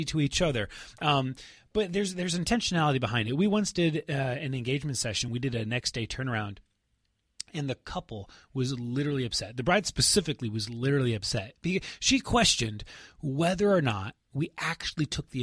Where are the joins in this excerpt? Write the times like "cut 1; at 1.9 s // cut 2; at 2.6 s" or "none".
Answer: none